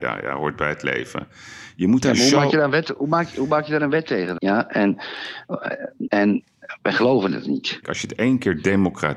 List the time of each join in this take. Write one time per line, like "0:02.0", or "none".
0:04.4
0:06.1
0:07.8